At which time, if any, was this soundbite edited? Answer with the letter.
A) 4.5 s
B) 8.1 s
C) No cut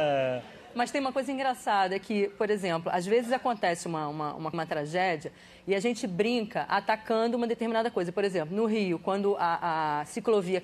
A